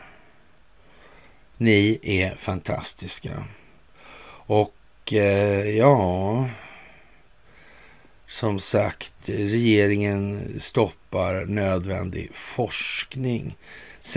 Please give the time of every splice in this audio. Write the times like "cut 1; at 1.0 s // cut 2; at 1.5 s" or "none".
cut 1; at 1.5 s